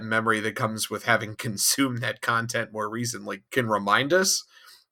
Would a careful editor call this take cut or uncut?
cut